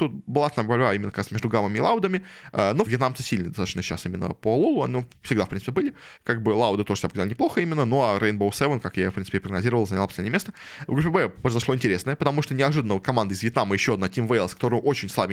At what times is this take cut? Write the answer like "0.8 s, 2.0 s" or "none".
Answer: 2.9 s, 6.2 s